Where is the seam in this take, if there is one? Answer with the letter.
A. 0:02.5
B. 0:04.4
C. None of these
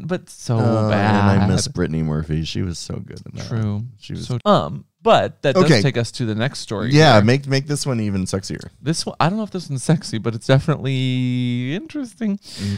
B